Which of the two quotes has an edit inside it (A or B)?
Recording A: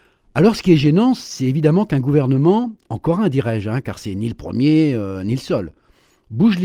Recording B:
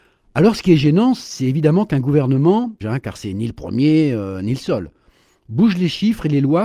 B